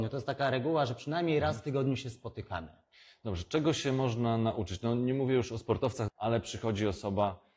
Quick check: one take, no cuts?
no; 1 cut; at 6.1 s

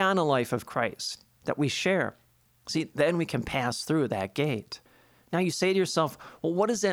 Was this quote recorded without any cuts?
yes; 0 cuts

